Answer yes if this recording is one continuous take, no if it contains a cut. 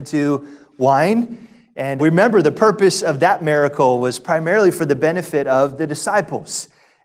no